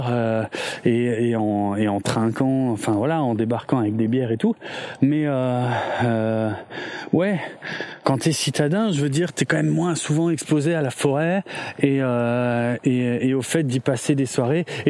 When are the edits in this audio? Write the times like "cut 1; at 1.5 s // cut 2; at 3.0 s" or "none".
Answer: cut 1; at 5.0 s